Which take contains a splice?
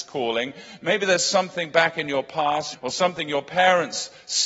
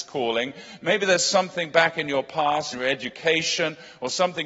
first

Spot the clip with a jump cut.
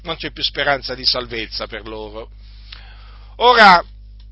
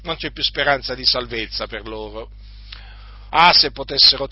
second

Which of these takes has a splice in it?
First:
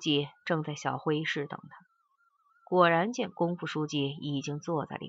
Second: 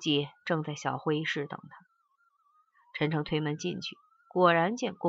first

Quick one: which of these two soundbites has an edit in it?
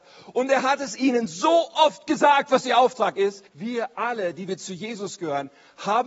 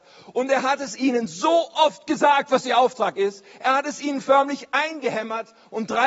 first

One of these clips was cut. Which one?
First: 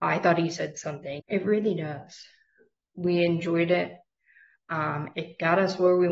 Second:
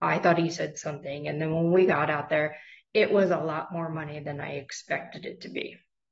first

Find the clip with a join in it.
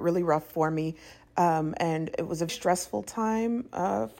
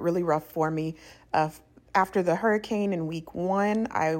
first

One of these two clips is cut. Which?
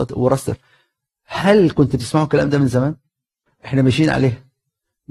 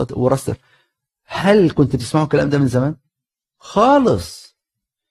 first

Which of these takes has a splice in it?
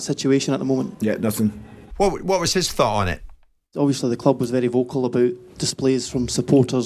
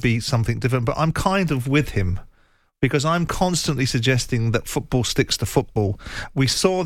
first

